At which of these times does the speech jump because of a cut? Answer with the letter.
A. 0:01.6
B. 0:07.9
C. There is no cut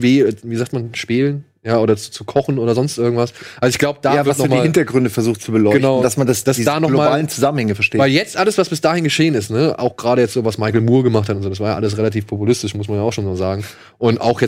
C